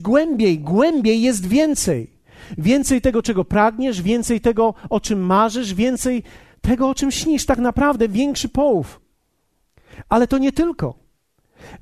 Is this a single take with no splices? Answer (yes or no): yes